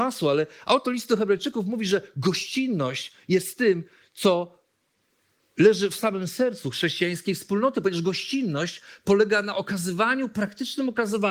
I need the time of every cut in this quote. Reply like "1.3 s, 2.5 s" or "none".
none